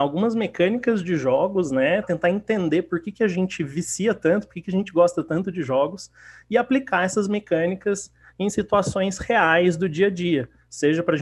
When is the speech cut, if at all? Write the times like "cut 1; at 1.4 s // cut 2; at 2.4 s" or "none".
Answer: cut 1; at 2.0 s